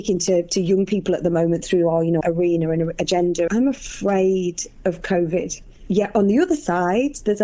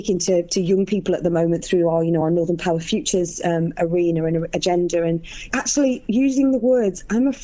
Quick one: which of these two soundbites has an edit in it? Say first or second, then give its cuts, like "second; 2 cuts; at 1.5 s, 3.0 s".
first; 2 cuts; at 2.2 s, 3.5 s